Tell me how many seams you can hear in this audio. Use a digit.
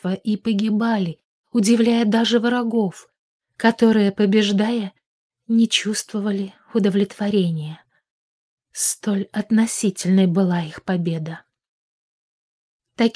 0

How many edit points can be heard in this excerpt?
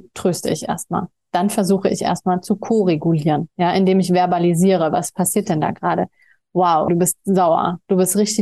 1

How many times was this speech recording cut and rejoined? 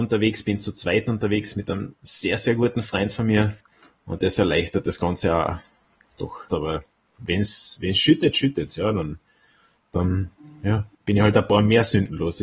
2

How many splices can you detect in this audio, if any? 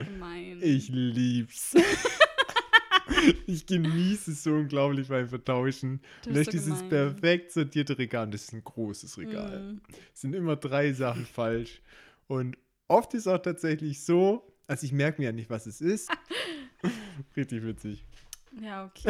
1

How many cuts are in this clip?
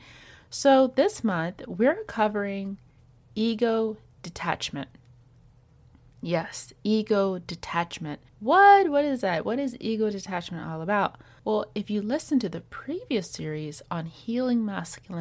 1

